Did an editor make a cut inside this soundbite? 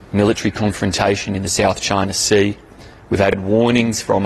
no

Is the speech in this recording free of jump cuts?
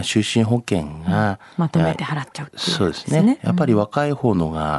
no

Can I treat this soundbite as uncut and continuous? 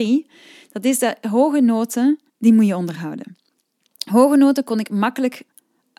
no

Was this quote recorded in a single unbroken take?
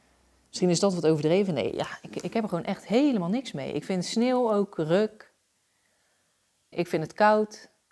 no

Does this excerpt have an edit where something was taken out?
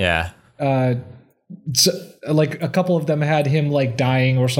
no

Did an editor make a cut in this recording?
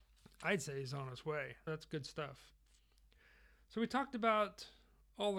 yes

